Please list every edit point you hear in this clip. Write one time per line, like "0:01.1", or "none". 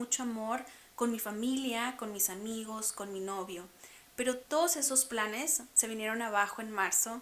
none

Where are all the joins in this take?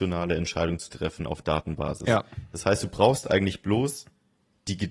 none

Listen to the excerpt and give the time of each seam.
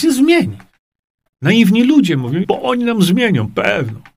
0:01.3
0:02.4

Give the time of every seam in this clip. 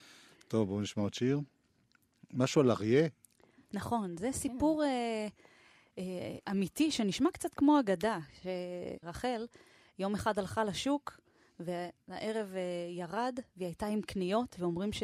0:09.0

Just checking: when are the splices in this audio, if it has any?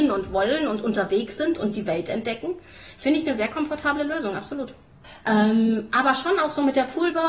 0:05.2

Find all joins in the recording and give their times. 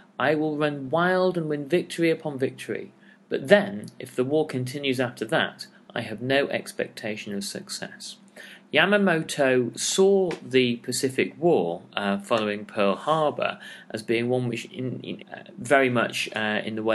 0:15.2

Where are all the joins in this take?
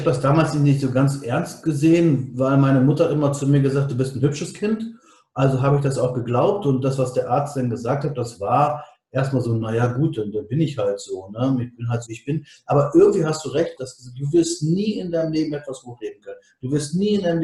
0:12.1
0:13.8

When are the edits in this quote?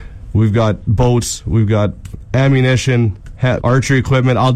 0:03.6

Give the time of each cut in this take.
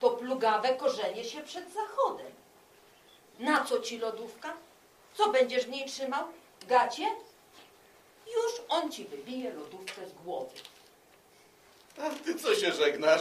0:08.2

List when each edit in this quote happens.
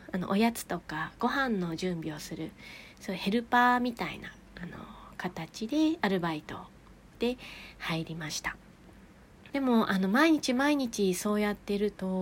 0:09.5

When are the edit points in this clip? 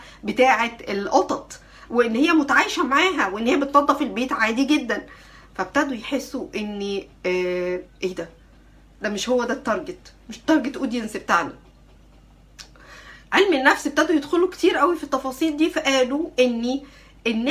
none

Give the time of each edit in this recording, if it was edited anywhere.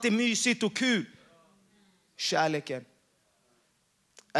none

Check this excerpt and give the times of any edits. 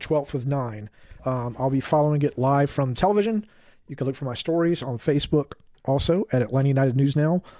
0:01.2
0:03.8

